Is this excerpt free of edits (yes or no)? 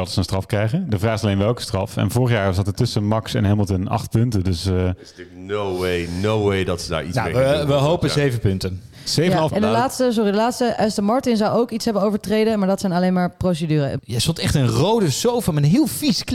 no